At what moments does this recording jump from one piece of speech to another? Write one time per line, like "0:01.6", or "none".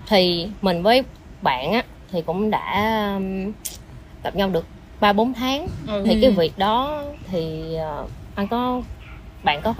0:06.0